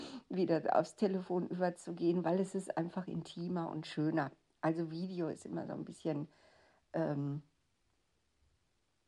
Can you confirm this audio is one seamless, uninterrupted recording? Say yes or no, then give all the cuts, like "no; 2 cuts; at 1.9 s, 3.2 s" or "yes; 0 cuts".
yes; 0 cuts